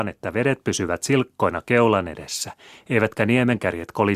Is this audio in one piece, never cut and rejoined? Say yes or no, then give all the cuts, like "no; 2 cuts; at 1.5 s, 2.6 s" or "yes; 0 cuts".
yes; 0 cuts